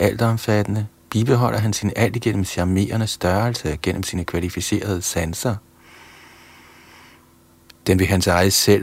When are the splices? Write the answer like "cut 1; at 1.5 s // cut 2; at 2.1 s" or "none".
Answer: cut 1; at 7.7 s